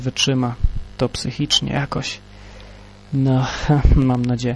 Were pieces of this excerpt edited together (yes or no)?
no